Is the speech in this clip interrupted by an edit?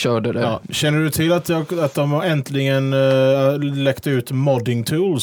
no; 0 cuts

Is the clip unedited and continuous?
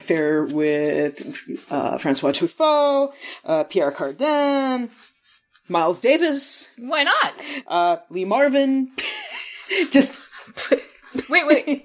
yes; 0 cuts

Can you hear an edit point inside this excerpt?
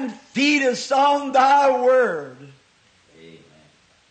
no; 0 cuts

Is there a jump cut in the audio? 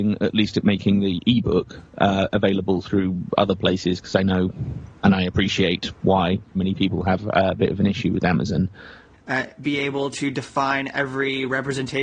yes; 2 cuts; at 6.5 s, 9.1 s

